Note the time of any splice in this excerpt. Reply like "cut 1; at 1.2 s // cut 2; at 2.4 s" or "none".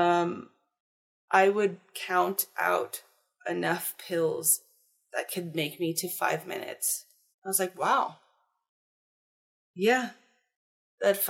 cut 1; at 7.3 s